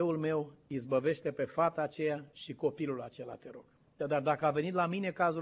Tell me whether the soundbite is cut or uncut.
cut